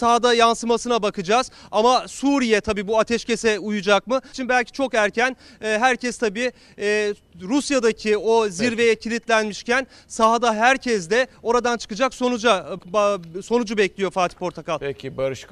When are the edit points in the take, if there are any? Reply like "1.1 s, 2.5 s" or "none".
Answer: 4.3 s, 12.8 s